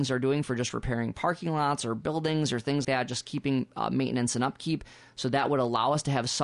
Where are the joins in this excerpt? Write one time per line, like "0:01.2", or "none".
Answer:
0:02.8